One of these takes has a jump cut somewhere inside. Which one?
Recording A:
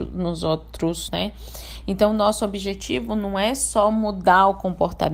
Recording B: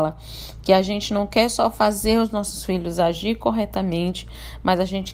A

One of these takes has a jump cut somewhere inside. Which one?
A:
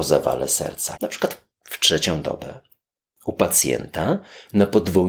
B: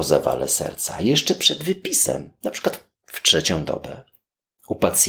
A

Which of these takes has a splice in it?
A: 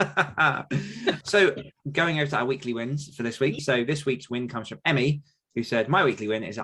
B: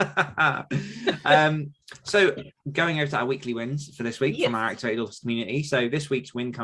A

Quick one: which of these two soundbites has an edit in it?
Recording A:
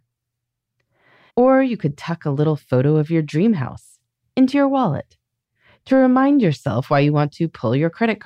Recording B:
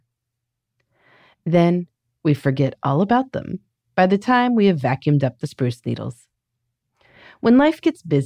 A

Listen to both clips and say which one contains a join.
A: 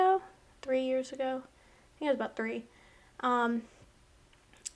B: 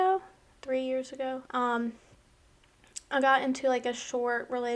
B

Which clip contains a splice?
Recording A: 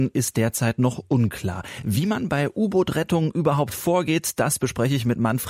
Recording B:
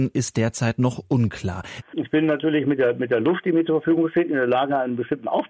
B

